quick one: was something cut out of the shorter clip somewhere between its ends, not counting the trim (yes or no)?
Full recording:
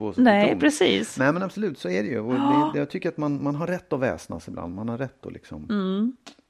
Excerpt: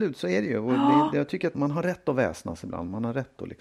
yes